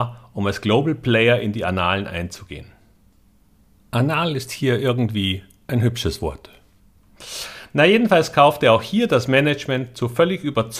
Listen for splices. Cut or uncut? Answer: uncut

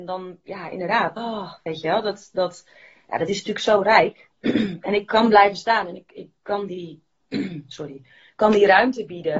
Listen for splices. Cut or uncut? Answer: cut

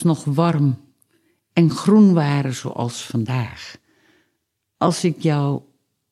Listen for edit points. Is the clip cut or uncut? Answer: uncut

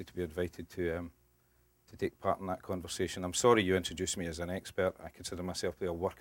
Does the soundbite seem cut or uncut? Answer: uncut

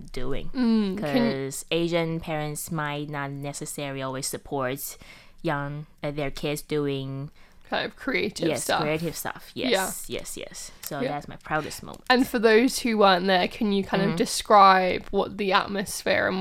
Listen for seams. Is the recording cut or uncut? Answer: uncut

